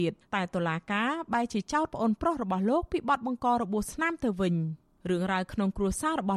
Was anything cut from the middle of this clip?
no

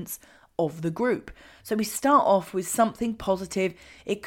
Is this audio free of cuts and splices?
no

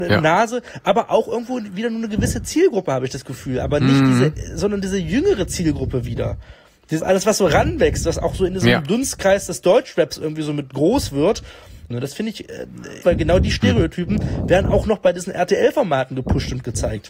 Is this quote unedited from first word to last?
no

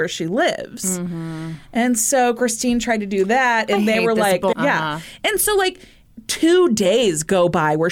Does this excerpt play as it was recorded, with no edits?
no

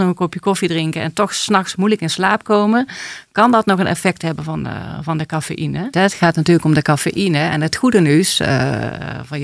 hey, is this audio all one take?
no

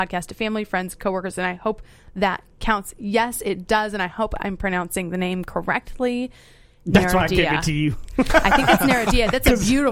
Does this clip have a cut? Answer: no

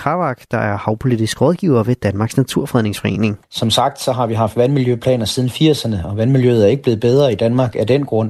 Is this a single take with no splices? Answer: no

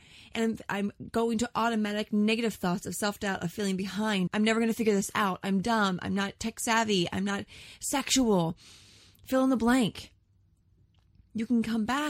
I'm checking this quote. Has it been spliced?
yes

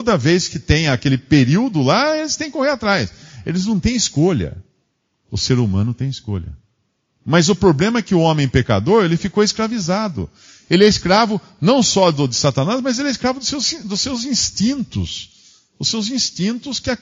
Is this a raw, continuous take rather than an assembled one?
yes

